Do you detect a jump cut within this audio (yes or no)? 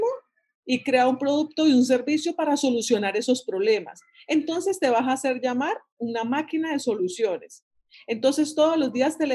no